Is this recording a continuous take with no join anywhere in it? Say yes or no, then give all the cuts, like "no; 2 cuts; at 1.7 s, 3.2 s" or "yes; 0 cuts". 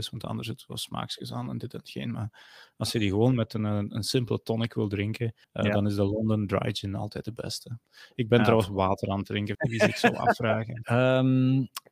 no; 3 cuts; at 5.4 s, 9.5 s, 10.8 s